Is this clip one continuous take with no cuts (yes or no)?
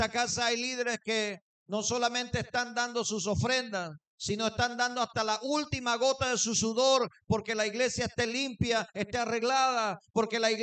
yes